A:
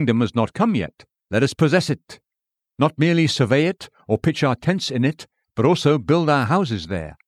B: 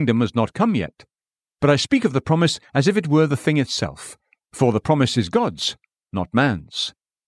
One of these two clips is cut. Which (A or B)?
A